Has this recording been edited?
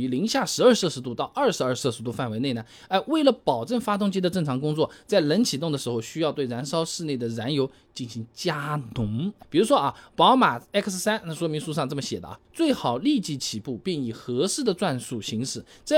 yes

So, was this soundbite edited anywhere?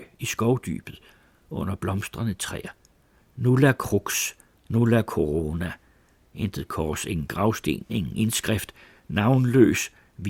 no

